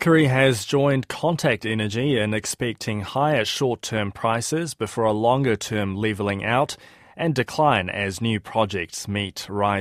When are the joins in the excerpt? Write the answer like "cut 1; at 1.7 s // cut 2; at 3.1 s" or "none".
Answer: none